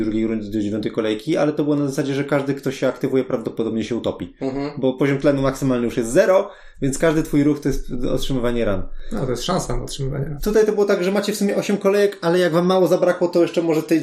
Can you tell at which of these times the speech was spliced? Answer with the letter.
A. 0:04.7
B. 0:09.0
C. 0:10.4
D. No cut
C